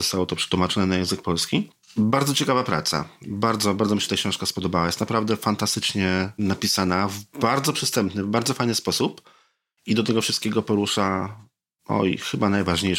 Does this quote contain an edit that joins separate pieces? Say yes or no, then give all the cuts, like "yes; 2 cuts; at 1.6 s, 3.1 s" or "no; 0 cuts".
no; 0 cuts